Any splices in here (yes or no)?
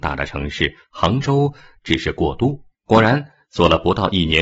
yes